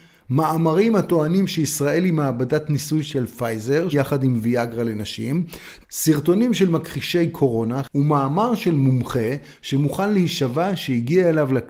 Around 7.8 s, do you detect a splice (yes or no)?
yes